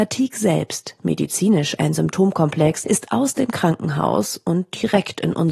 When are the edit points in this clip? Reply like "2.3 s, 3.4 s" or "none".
1.8 s, 2.8 s